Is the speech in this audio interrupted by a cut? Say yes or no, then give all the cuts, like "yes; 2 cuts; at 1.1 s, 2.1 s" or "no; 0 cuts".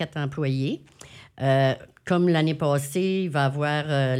no; 0 cuts